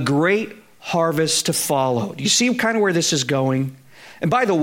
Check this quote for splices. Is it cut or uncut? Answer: uncut